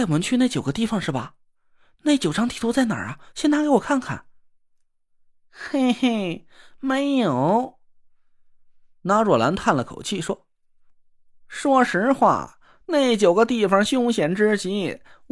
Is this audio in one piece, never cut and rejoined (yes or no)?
yes